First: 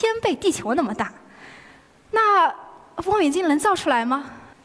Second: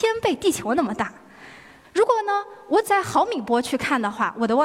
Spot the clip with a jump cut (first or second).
second